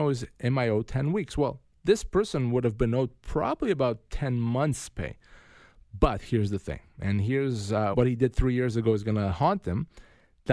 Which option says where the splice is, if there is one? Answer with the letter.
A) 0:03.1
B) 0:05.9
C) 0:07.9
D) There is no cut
C